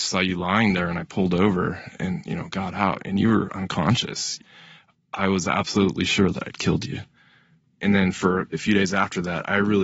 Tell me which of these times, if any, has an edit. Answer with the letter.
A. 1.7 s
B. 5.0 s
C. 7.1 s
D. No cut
D